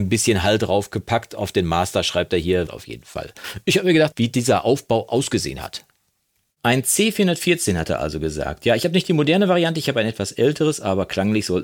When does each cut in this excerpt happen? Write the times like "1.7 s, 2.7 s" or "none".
2.7 s, 4.1 s